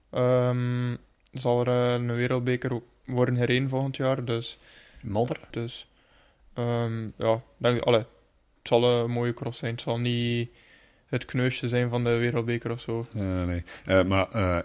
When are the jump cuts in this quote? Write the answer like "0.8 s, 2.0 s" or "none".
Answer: 5.5 s